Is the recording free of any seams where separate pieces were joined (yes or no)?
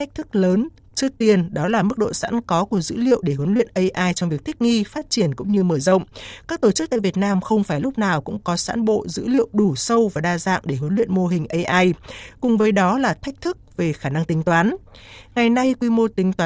yes